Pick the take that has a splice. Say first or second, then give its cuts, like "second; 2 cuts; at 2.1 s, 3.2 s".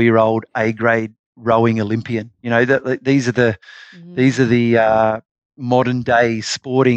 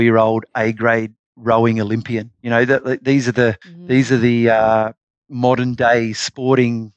second; 1 cut; at 3.6 s